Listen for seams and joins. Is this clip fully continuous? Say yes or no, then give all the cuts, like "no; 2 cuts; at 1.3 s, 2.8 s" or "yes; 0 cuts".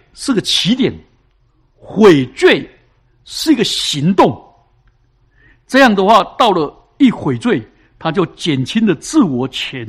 yes; 0 cuts